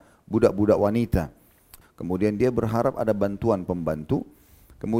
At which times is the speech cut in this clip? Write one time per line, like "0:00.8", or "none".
0:01.8